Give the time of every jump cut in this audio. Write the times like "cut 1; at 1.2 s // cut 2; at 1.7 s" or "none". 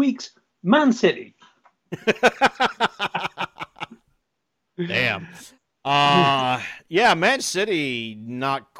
none